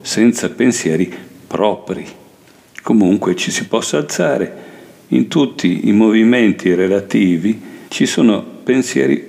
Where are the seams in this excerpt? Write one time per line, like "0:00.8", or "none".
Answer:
0:07.9